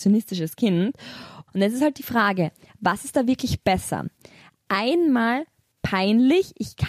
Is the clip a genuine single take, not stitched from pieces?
no; 1 cut; at 1.5 s

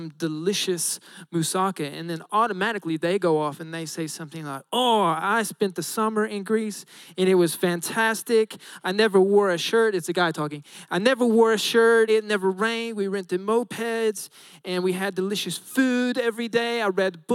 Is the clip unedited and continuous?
no; 1 cut; at 12.1 s

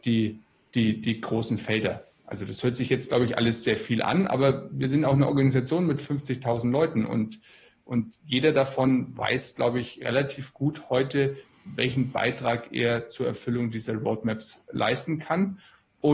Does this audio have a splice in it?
no; 0 cuts

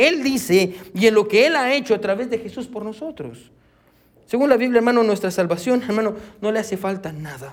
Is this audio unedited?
yes; 0 cuts

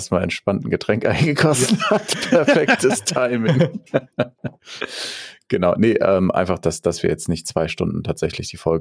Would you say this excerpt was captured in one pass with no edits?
yes; 0 cuts

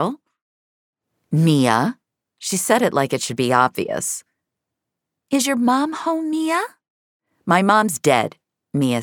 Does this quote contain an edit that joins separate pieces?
no; 0 cuts

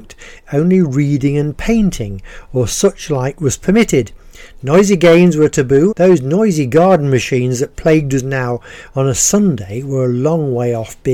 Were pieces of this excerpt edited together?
yes; 1 cut; at 5.9 s

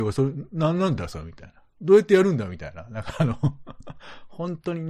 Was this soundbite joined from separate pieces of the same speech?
no; 0 cuts

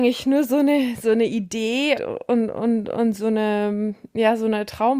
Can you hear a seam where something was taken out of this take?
yes; 1 cut; at 1.9 s

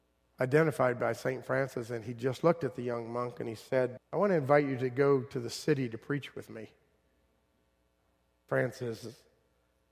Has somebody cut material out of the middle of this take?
yes; 2 cuts; at 4.0 s, 8.5 s

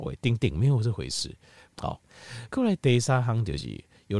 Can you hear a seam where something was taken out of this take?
yes; 1 cut; at 1.7 s

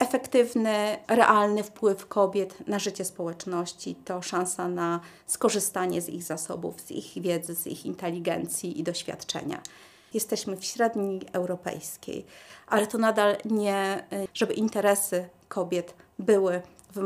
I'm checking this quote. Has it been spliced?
yes; 2 cuts; at 10.1 s, 14.3 s

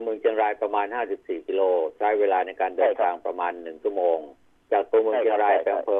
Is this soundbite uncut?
yes; 0 cuts

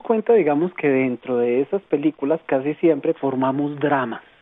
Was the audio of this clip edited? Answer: yes; 1 cut; at 3.1 s

